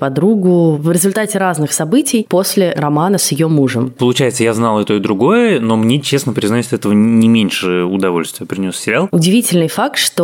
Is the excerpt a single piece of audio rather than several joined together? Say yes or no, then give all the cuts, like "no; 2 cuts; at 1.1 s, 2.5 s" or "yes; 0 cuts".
no; 1 cut; at 4.0 s